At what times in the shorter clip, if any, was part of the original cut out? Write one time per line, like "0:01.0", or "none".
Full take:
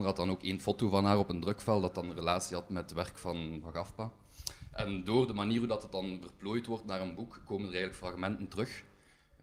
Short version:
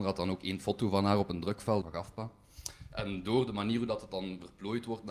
0:01.8